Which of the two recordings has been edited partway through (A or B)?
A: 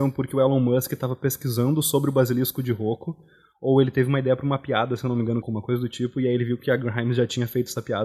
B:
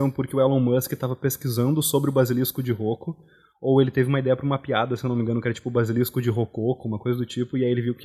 A